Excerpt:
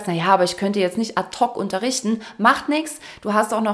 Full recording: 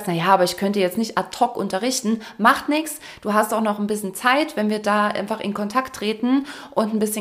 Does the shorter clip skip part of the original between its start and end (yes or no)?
no